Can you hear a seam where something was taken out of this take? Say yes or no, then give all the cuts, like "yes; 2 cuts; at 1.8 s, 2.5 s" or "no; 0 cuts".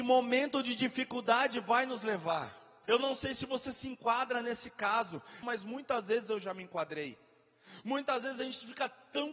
yes; 2 cuts; at 2.8 s, 5.4 s